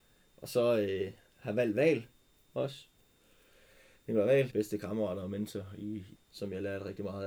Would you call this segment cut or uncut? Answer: cut